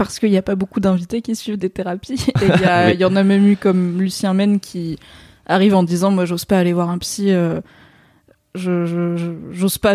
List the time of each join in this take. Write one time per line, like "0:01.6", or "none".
none